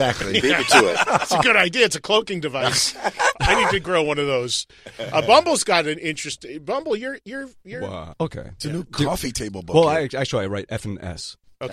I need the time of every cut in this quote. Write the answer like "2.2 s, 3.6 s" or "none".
8.1 s

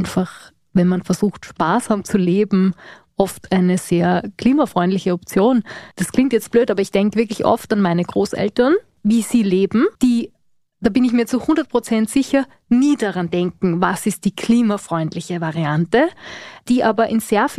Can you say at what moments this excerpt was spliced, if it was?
9.9 s

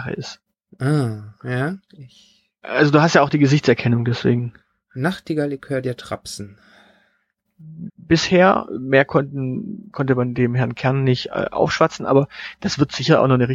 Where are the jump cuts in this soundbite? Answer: 7.9 s

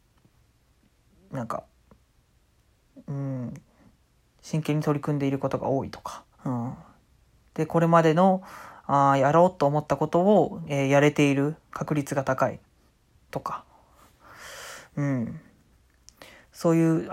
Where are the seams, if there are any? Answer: 6.3 s

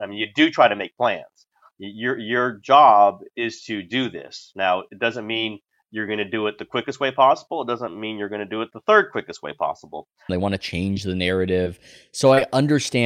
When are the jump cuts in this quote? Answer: 10.3 s

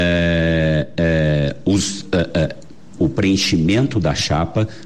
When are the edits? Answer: 3.0 s

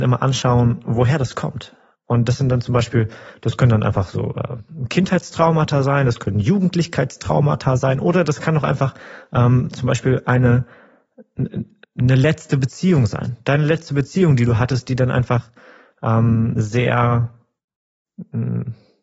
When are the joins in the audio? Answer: none

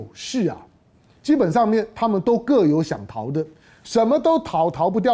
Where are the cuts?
none

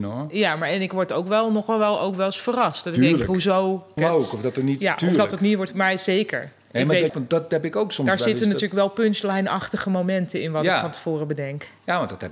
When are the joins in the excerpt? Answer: 4.0 s, 7.1 s

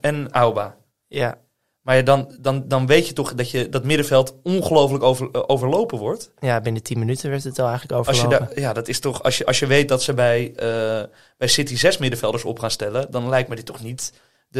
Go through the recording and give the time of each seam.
none

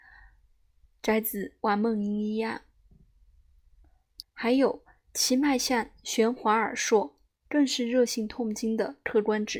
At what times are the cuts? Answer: 4.2 s

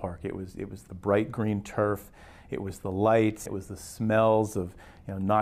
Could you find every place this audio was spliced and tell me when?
3.5 s

